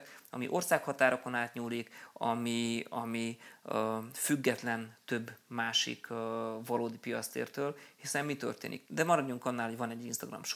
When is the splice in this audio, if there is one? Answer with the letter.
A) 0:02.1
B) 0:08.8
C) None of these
B